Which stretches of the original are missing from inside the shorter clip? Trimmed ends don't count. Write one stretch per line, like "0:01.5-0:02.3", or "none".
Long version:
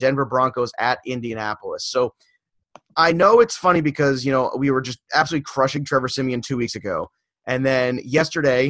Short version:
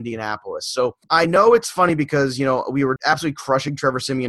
0:02.2-0:02.9
0:04.8-0:05.0